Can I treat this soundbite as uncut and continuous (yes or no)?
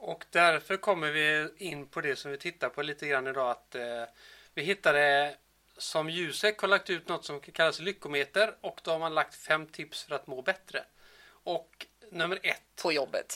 yes